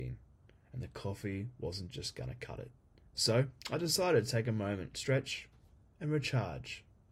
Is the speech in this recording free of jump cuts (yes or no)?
no